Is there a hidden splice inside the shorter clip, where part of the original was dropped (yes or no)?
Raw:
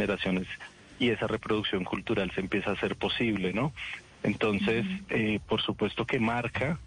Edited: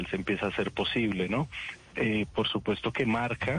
yes